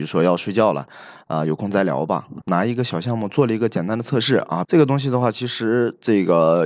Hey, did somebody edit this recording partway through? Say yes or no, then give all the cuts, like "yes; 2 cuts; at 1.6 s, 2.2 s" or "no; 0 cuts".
yes; 2 cuts; at 2.4 s, 4.6 s